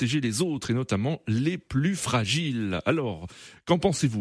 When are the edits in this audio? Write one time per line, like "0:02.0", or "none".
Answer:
none